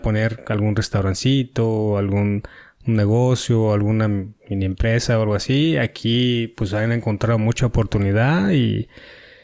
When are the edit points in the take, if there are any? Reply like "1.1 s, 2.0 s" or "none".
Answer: none